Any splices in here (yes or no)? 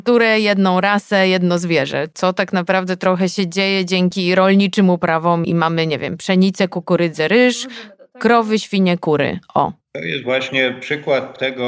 yes